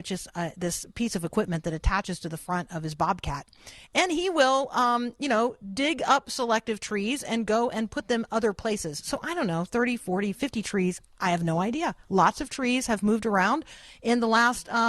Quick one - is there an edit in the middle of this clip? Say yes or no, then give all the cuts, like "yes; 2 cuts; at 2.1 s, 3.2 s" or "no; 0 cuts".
no; 0 cuts